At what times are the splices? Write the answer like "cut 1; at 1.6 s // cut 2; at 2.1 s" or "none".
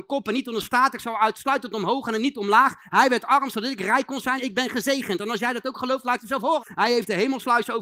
cut 1; at 4.4 s // cut 2; at 6.6 s

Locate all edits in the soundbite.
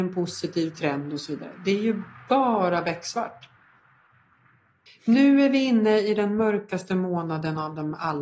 cut 1; at 4.9 s

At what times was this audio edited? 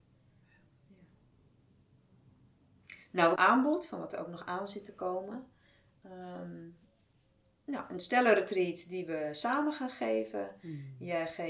cut 1; at 3.4 s

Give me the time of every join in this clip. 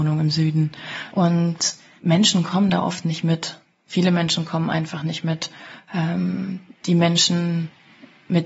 cut 1; at 1.1 s

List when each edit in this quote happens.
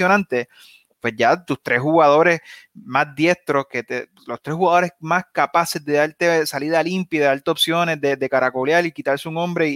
none

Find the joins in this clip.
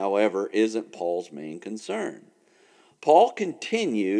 none

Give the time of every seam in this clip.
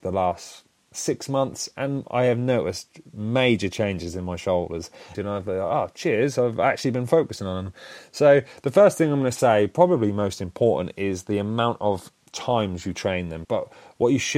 cut 1; at 5.1 s // cut 2; at 13.4 s

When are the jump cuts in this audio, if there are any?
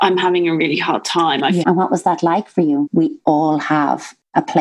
cut 1; at 1.6 s // cut 2; at 2.9 s

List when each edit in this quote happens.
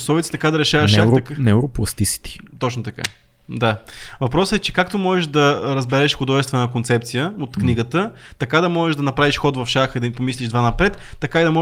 none

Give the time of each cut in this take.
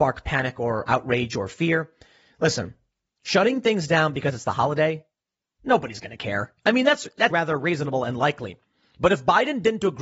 cut 1; at 7.3 s

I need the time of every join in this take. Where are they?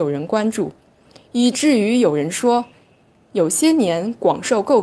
none

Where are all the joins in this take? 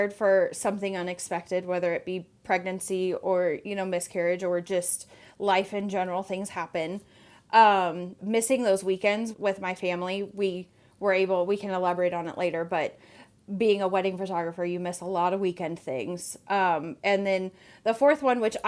cut 1; at 8.2 s // cut 2; at 9.3 s

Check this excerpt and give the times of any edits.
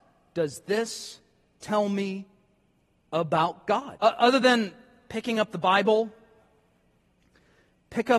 cut 1; at 4.0 s

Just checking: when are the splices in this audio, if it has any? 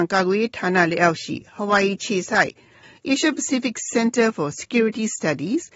none

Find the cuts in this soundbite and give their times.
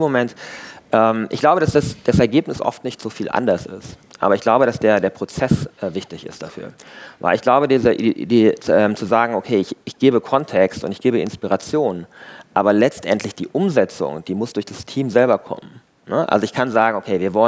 none

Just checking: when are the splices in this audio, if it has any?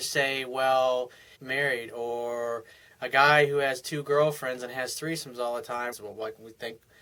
cut 1; at 1.4 s // cut 2; at 5.9 s

